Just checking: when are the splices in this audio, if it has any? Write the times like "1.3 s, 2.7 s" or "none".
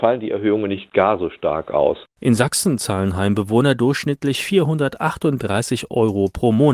none